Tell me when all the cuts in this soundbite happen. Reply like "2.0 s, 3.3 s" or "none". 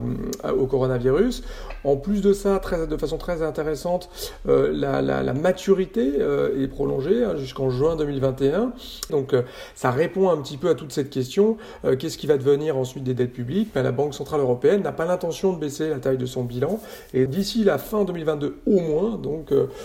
9.1 s, 17.3 s